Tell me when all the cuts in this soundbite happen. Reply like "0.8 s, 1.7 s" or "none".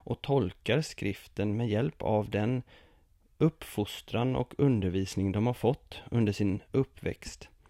none

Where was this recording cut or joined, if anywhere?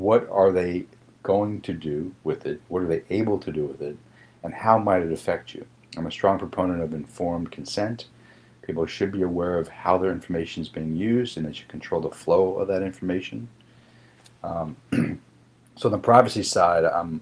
none

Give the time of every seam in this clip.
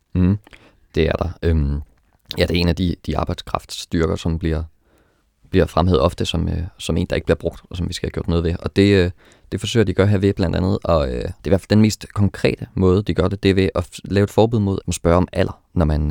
11.4 s, 13.7 s, 14.8 s

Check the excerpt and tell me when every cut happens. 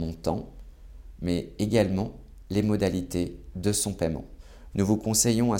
4.7 s

